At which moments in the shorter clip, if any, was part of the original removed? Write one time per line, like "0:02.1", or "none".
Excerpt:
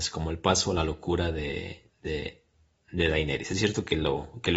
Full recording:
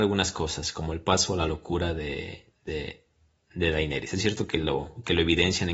none